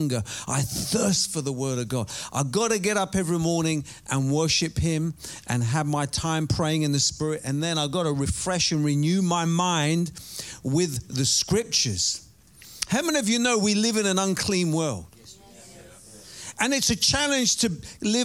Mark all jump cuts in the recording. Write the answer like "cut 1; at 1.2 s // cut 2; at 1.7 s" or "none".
none

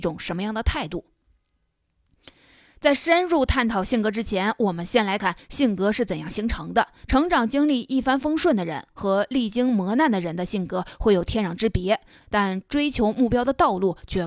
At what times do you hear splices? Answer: cut 1; at 5.2 s // cut 2; at 7.0 s // cut 3; at 12.2 s

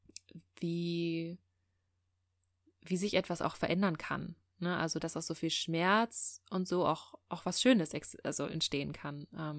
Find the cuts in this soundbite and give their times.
cut 1; at 5.0 s

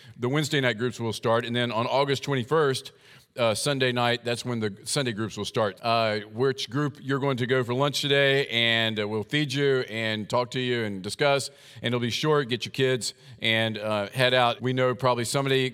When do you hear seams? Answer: cut 1; at 5.8 s // cut 2; at 14.6 s

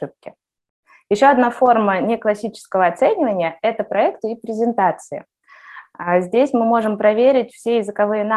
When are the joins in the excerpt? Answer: none

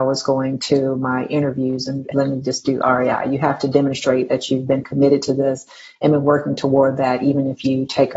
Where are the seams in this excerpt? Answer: cut 1; at 2.1 s

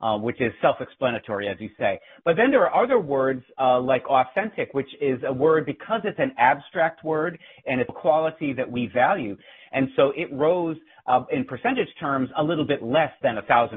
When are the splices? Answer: cut 1; at 7.9 s // cut 2; at 9.6 s

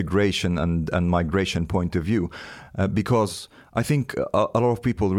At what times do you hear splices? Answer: none

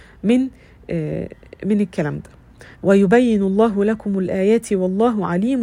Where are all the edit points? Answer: cut 1; at 2.7 s

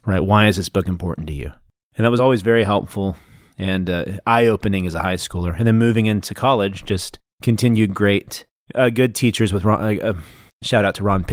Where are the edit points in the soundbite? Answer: none

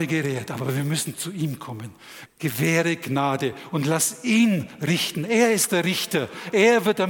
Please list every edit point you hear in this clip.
cut 1; at 2.3 s

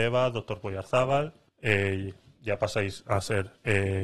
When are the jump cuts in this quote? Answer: cut 1; at 1.5 s

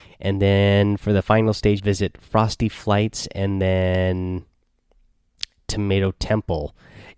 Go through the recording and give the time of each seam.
cut 1; at 1.8 s

